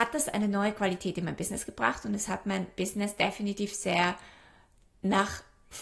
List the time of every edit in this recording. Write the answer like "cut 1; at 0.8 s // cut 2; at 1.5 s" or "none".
none